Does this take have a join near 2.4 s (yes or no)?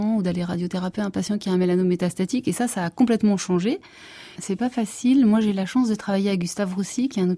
no